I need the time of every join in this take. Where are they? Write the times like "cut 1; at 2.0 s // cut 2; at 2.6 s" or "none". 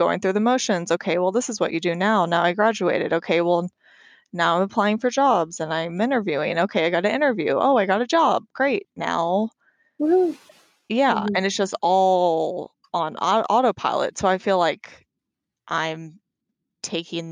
none